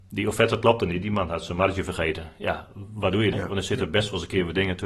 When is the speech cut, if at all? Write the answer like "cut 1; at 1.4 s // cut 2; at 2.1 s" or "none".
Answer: cut 1; at 3.3 s